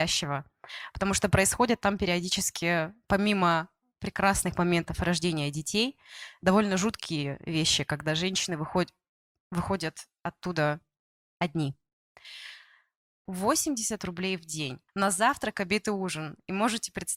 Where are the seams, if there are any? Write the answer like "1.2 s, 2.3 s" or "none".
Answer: 13.3 s, 14.9 s